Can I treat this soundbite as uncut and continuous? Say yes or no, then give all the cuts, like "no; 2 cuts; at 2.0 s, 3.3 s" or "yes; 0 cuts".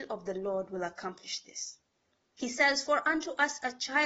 no; 1 cut; at 2.3 s